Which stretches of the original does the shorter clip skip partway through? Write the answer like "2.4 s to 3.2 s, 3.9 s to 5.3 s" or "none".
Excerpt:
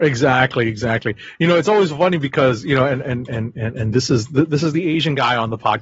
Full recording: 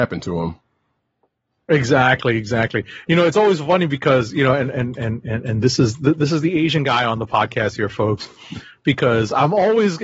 none